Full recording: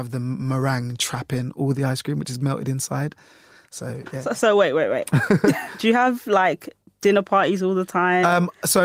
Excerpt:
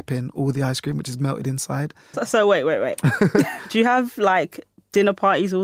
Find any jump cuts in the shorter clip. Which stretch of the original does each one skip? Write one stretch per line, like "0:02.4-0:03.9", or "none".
0:03.4-0:04.2